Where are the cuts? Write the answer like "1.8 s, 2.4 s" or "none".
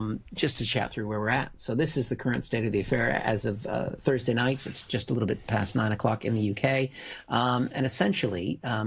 none